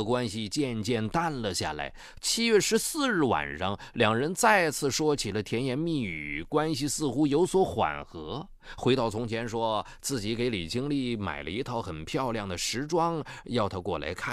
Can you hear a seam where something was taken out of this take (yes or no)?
yes